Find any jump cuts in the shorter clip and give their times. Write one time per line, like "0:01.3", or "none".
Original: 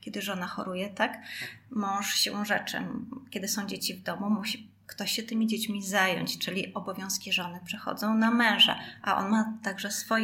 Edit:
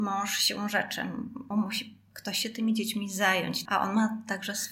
0:01.5
0:03.7